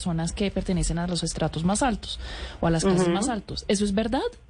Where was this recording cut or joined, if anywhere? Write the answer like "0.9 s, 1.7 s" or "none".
none